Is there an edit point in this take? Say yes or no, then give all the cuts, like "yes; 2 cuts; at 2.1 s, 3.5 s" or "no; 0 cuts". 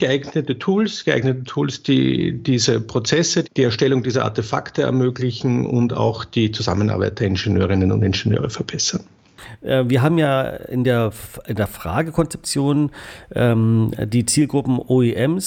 yes; 1 cut; at 3.4 s